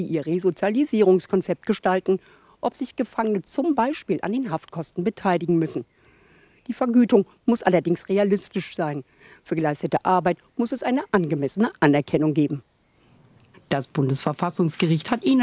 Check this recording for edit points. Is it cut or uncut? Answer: cut